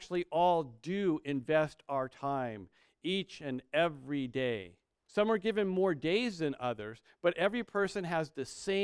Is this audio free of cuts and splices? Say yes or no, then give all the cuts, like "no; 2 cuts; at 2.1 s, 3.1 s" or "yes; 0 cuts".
no; 1 cut; at 5.1 s